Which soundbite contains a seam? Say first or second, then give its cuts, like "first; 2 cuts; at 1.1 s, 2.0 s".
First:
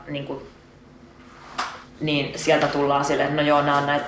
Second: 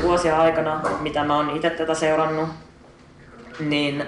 first; 1 cut; at 1.8 s